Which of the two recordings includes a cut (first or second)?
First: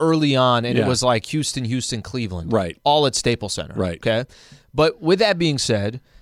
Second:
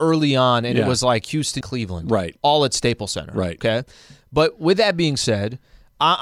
second